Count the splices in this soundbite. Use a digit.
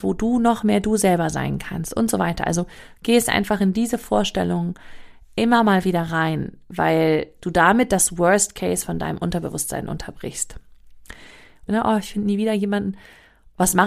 1